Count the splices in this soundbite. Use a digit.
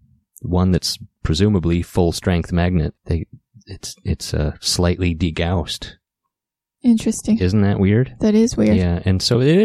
1